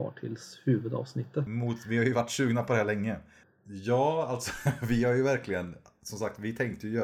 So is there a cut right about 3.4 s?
yes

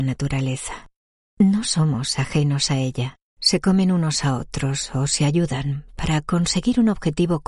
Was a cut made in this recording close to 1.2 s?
no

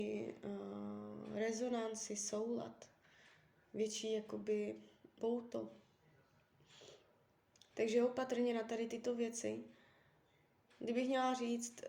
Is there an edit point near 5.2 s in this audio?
yes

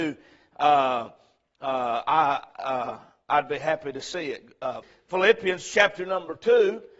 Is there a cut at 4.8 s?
yes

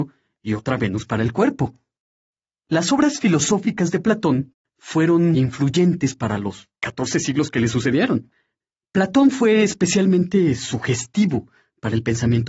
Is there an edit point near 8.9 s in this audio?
no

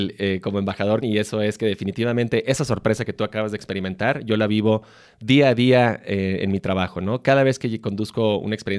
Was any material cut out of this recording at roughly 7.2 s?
no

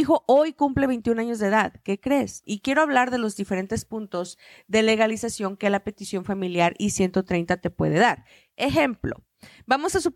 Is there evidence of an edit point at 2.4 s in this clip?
yes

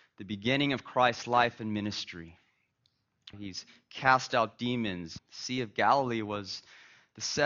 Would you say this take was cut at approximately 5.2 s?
yes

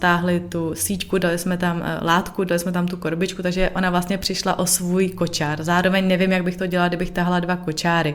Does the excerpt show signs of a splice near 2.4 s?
no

